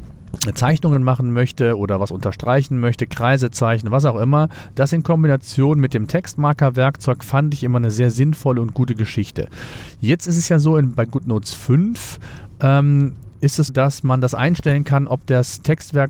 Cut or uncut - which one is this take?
cut